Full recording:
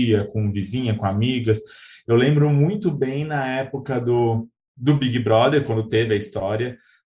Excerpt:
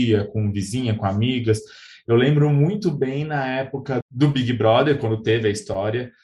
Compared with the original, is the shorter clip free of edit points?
no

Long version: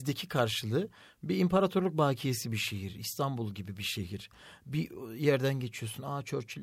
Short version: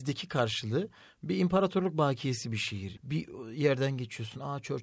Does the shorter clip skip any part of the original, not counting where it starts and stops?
yes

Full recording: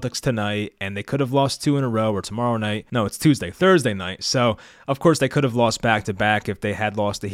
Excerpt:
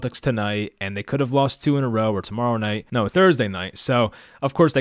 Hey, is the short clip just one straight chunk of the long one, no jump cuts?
no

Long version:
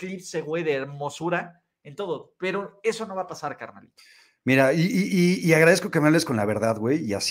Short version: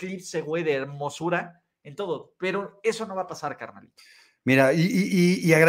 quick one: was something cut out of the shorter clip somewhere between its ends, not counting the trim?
no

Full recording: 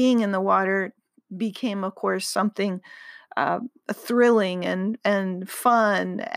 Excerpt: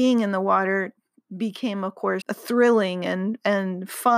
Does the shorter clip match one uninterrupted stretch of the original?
no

